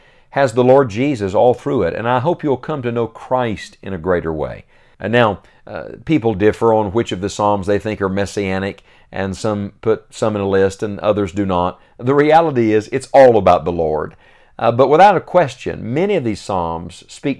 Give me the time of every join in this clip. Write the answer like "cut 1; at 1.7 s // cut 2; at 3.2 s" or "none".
cut 1; at 4.9 s